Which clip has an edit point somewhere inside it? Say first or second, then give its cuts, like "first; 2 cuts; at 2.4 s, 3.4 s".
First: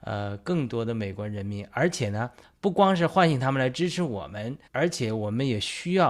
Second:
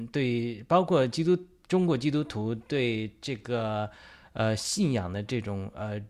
first; 1 cut; at 4.7 s